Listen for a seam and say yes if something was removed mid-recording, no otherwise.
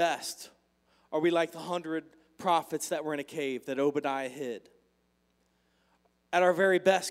no